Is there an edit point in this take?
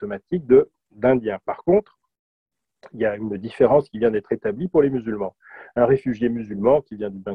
no; 0 cuts

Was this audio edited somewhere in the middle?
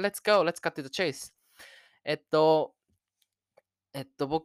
no; 0 cuts

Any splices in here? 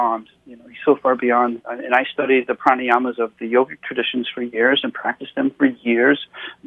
yes; 1 cut; at 1.6 s

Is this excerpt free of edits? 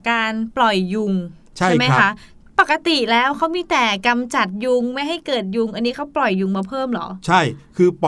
yes; 0 cuts

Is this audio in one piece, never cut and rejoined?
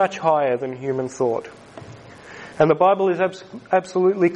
yes; 0 cuts

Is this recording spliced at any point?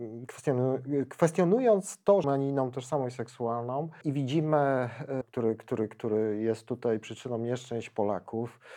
yes; 3 cuts; at 2.2 s, 4.0 s, 5.2 s

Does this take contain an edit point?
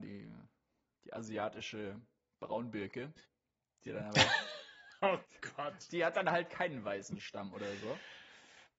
no; 0 cuts

